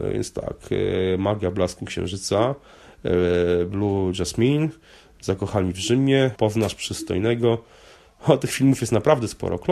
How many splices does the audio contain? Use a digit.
1